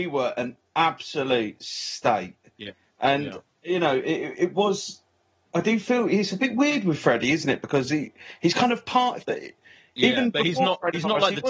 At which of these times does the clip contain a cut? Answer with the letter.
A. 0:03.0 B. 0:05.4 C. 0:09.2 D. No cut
C